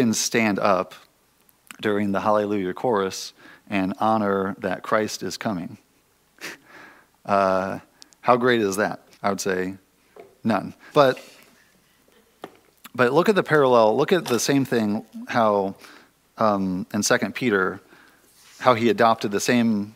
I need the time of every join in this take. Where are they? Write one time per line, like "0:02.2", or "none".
0:09.1
0:10.9